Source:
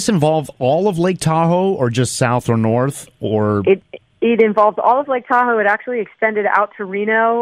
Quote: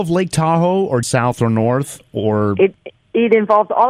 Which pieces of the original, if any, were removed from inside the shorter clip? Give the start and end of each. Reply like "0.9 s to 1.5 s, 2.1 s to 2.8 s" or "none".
1.9 s to 2.1 s